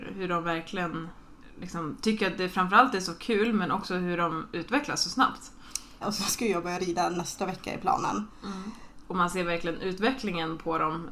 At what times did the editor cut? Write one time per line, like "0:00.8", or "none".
0:06.0
0:09.0